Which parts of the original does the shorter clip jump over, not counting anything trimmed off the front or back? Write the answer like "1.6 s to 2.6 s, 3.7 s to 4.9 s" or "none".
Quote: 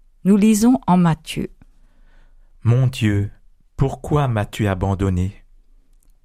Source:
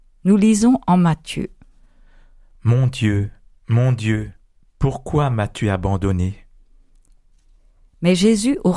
3.5 s to 4.6 s